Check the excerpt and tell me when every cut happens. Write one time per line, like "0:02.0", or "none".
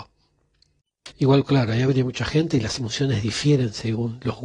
0:01.1

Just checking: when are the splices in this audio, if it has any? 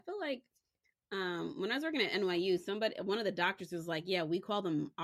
none

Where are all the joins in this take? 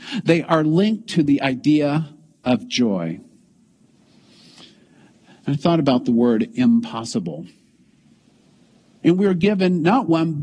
0:09.0

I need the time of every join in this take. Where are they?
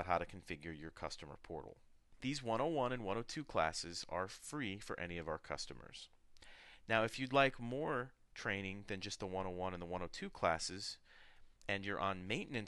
0:11.6

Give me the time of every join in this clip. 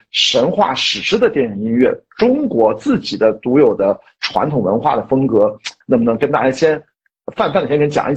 0:05.8

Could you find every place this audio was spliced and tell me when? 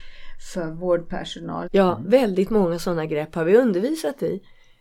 0:01.6

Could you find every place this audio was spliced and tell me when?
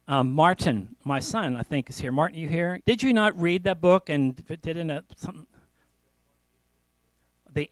0:02.8

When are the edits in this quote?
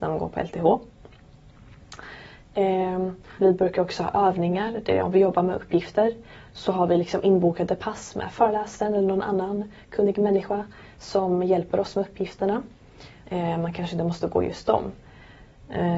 0:03.4
0:13.2

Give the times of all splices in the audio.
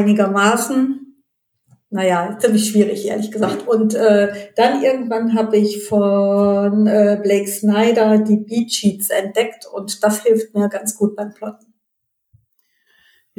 none

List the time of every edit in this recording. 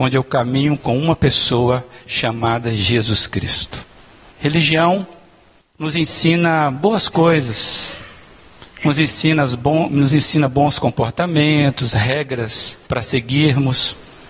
0:04.3
0:12.9

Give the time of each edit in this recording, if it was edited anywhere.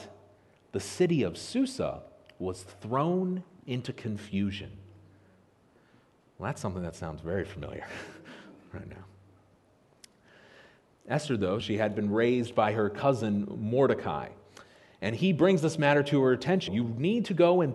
0:11.6
0:16.7

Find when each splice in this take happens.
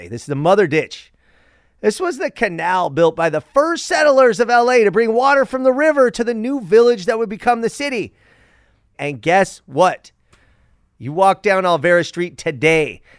0:08.9

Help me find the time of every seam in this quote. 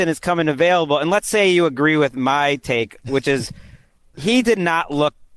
none

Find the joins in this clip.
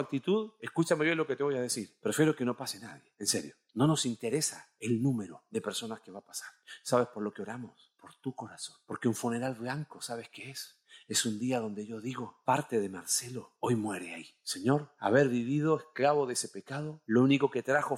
none

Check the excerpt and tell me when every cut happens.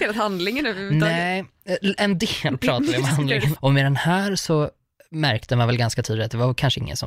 0:03.6

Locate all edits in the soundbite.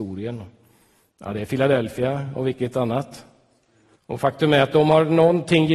0:04.0

